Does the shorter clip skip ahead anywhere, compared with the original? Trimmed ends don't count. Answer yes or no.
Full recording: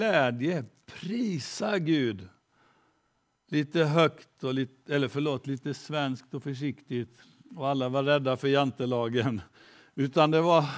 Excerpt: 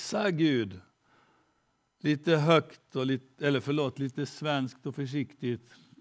no